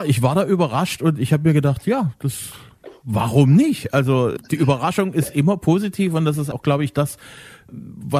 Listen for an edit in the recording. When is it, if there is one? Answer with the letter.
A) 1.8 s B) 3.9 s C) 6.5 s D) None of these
C